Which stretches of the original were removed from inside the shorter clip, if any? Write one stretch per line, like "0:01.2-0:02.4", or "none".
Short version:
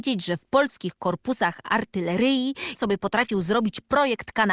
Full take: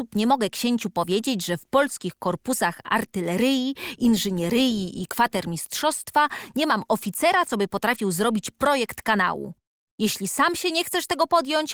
0:04.0-0:07.4